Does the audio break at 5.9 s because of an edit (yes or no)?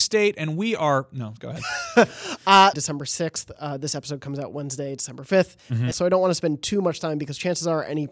yes